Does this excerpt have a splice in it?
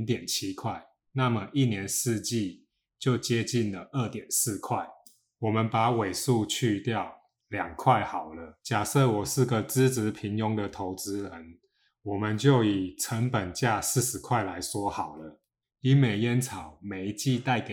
yes; 2 cuts; at 7.4 s, 8.6 s

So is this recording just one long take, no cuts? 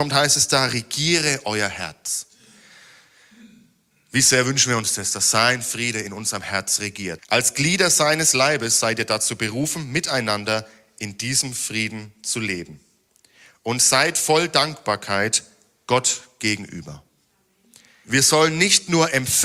no; 2 cuts; at 7.2 s, 18.0 s

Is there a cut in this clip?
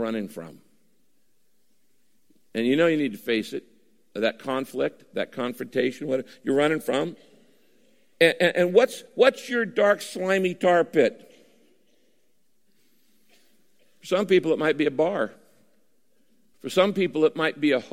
yes; 1 cut; at 16.5 s

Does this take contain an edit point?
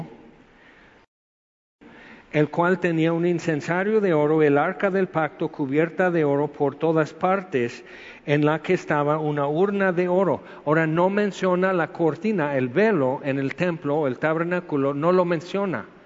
no; 0 cuts

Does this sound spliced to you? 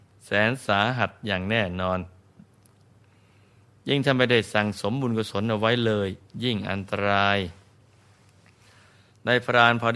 no; 0 cuts

